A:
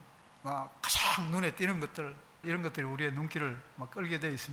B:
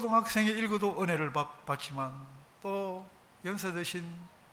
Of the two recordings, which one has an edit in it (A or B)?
A